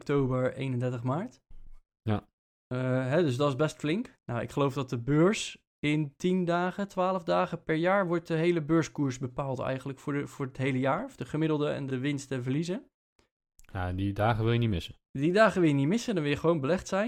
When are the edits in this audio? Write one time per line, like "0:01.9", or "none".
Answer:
0:04.1
0:11.9